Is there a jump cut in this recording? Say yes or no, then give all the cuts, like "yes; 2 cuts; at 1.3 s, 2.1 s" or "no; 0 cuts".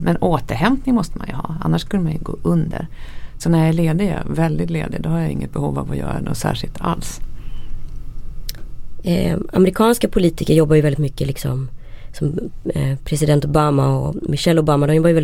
no; 0 cuts